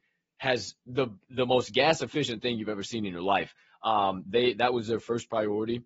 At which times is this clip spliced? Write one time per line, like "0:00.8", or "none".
none